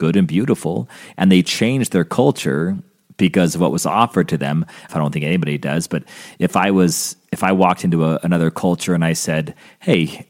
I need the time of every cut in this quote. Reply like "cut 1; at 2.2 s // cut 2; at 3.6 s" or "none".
cut 1; at 4.9 s